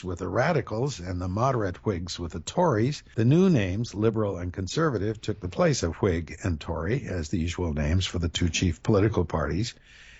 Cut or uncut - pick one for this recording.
uncut